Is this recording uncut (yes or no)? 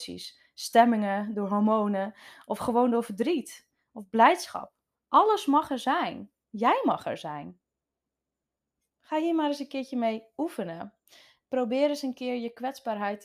yes